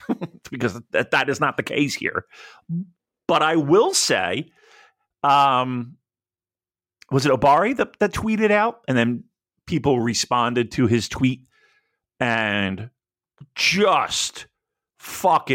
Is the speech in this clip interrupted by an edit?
no; 0 cuts

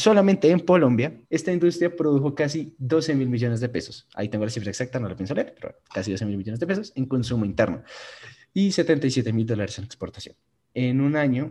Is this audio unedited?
no; 1 cut; at 1.3 s

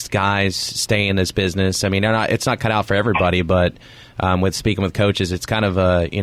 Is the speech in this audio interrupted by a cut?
no; 0 cuts

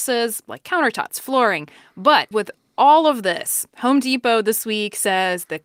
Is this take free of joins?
no; 2 cuts; at 1.1 s, 2.3 s

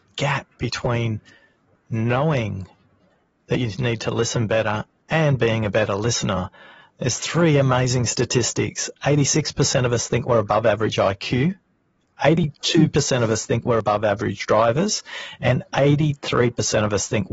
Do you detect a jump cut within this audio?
no; 0 cuts

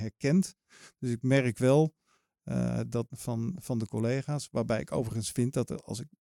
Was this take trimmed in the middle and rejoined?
yes; 1 cut; at 3.1 s

